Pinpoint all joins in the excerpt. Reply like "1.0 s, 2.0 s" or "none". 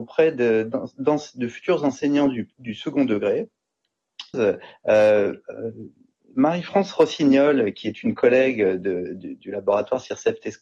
4.3 s